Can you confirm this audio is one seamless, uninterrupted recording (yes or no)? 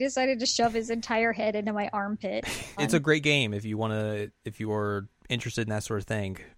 no